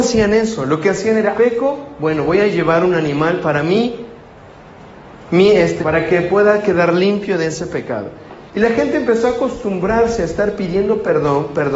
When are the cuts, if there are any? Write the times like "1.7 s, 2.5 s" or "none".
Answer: 1.3 s, 5.8 s